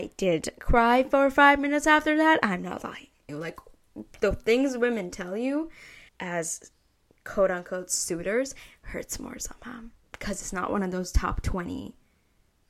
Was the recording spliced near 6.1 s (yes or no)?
yes